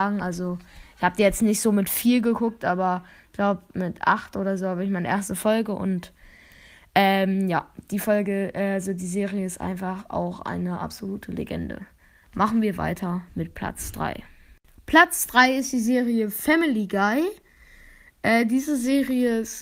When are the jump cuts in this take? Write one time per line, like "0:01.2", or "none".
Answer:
none